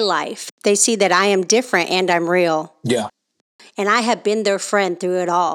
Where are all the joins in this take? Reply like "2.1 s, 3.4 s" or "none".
none